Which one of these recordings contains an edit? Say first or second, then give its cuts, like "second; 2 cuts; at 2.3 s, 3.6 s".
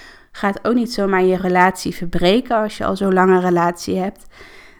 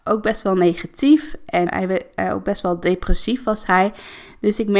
second; 1 cut; at 1.7 s